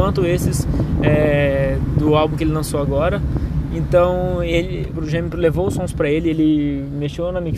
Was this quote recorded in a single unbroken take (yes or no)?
yes